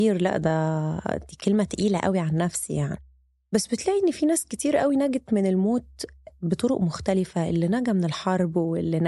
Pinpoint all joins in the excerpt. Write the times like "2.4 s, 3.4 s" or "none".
none